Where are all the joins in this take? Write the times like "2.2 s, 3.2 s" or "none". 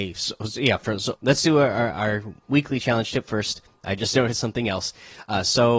1.2 s